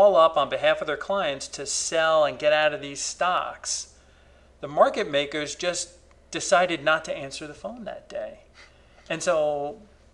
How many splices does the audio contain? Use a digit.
0